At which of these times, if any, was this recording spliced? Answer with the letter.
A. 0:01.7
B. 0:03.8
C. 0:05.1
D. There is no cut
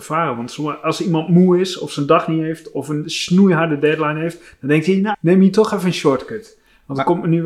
C